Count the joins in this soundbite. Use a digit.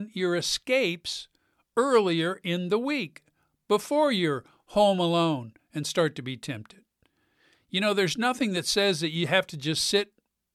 1